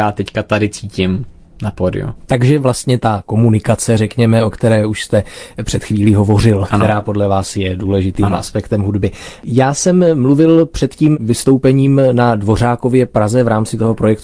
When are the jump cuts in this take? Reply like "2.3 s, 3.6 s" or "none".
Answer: 9.4 s